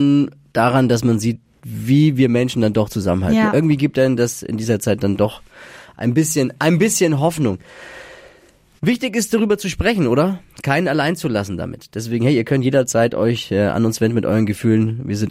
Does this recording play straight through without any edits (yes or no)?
yes